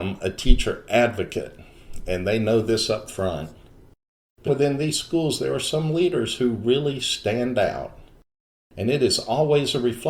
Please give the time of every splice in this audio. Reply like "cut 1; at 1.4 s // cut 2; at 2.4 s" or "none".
cut 1; at 4.5 s